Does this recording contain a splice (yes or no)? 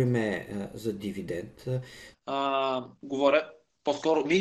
yes